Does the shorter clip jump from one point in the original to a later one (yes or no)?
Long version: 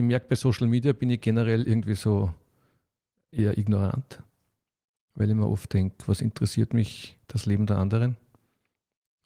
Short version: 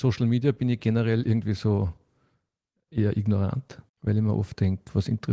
yes